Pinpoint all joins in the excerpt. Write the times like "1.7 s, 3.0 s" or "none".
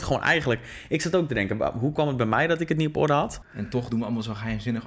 3.4 s